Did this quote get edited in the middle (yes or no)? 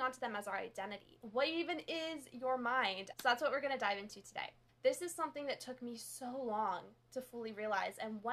yes